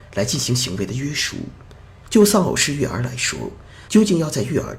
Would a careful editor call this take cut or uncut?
cut